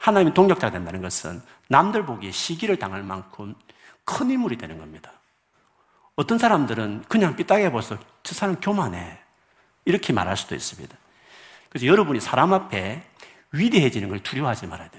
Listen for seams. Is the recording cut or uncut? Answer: cut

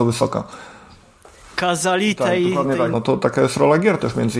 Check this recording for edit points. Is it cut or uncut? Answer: cut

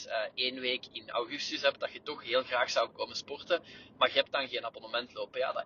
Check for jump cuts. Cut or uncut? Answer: uncut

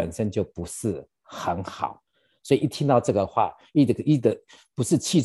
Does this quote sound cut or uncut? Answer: uncut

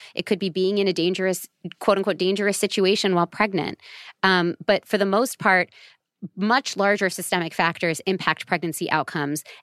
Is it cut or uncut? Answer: uncut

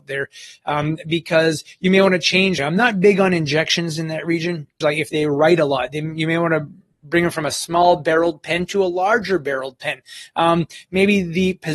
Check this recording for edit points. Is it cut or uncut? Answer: cut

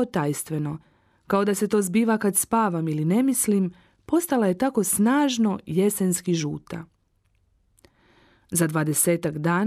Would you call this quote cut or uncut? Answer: uncut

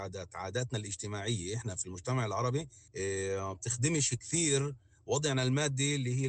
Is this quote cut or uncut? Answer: cut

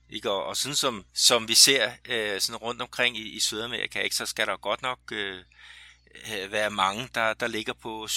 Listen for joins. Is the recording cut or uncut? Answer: cut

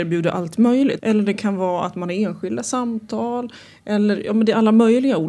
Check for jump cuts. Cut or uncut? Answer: cut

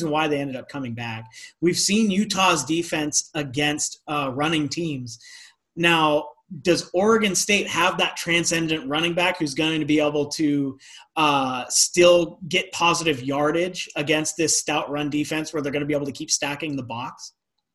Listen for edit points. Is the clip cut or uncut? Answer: uncut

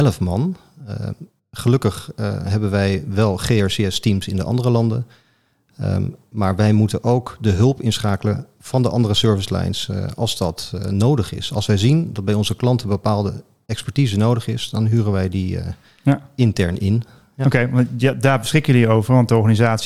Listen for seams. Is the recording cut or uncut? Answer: uncut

